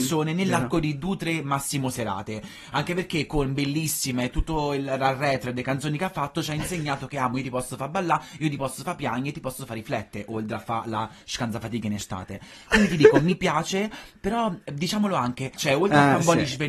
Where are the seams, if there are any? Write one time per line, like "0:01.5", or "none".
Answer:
0:15.6